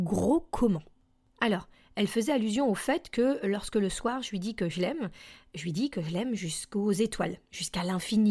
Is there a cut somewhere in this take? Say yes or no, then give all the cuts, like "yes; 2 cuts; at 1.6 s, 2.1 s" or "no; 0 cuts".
no; 0 cuts